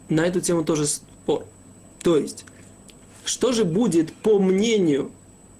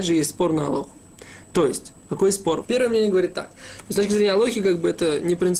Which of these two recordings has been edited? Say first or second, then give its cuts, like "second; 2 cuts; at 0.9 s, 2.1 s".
second; 2 cuts; at 2.6 s, 3.8 s